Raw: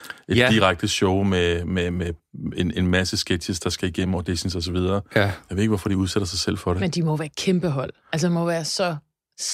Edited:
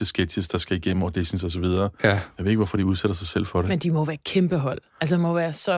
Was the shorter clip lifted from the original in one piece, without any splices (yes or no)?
yes